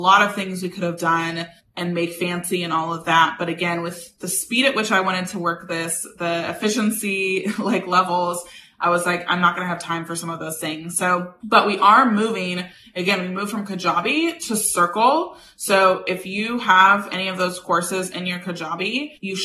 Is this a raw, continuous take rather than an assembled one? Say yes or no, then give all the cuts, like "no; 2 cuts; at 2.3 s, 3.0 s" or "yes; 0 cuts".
yes; 0 cuts